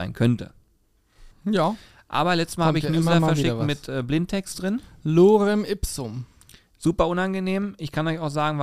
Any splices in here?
yes; 1 cut; at 1.3 s

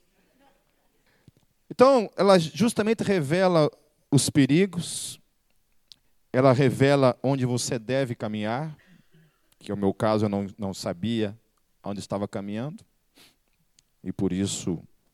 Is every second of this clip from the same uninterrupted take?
no; 1 cut; at 2.2 s

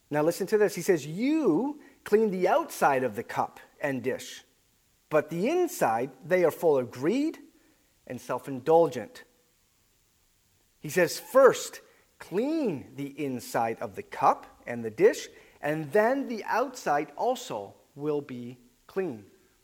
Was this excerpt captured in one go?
yes; 0 cuts

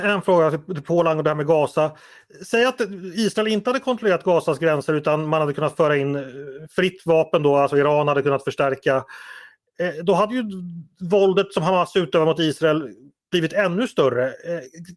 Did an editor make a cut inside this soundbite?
no; 0 cuts

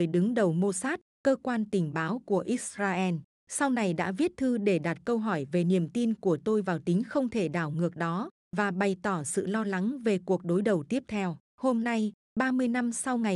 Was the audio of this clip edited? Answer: yes; 1 cut; at 11.5 s

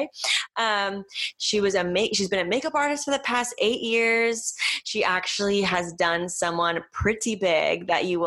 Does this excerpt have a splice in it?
no; 0 cuts

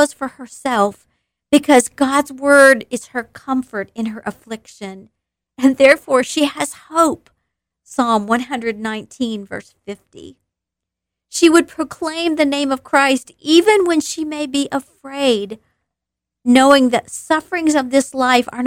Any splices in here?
no; 0 cuts

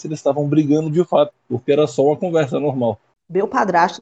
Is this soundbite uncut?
no; 1 cut; at 1.3 s

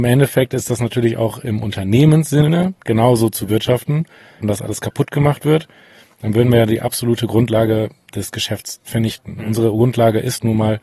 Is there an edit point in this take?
yes; 1 cut; at 4.4 s

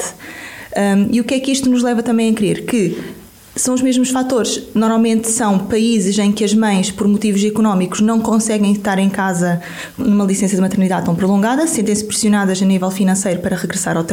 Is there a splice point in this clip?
yes; 1 cut; at 10.0 s

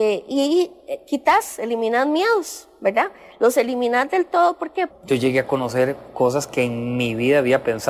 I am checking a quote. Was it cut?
yes; 1 cut; at 4.9 s

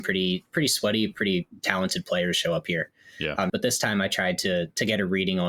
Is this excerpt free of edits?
no; 1 cut; at 3.5 s

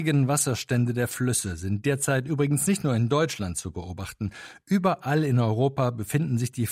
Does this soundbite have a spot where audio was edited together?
no; 0 cuts

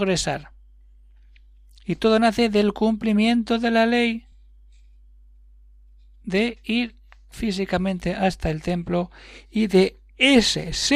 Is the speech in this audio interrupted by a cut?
no; 0 cuts

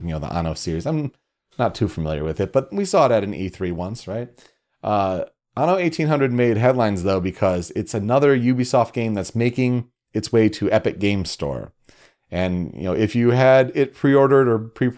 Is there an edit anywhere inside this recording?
no; 0 cuts

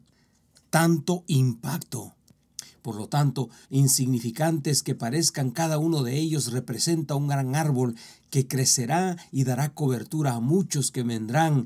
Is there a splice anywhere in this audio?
yes; 1 cut; at 3.6 s

